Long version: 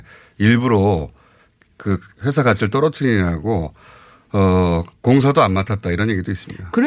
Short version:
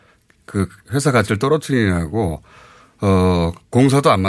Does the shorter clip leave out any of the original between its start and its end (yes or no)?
no